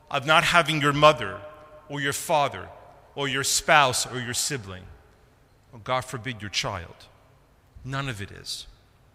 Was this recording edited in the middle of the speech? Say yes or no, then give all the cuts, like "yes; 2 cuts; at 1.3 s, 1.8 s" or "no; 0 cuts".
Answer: no; 0 cuts